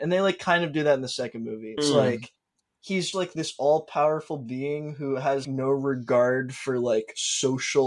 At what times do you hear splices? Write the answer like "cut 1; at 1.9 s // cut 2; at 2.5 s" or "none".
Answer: cut 1; at 1.8 s // cut 2; at 3.1 s // cut 3; at 5.4 s